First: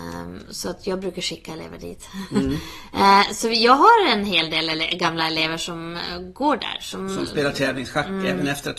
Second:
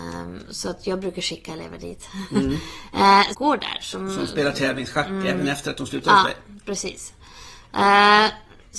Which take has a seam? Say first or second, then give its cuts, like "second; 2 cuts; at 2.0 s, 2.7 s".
second; 1 cut; at 3.3 s